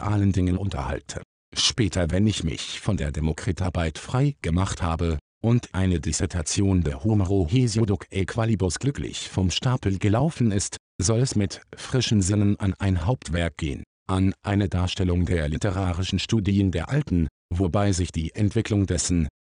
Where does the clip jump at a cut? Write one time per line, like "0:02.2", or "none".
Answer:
0:01.4